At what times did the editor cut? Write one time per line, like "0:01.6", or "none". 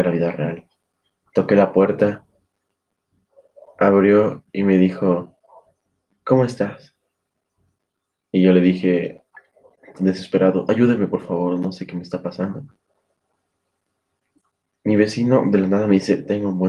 0:01.3